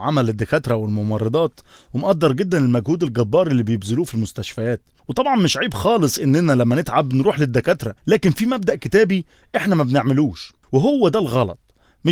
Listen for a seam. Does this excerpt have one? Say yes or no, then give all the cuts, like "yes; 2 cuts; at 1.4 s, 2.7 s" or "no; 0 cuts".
yes; 1 cut; at 8.0 s